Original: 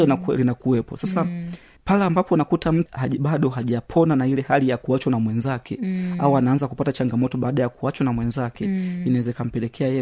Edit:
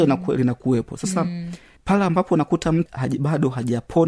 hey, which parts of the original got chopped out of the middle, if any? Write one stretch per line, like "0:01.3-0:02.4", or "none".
none